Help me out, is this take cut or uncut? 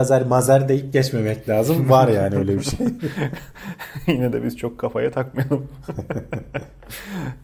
uncut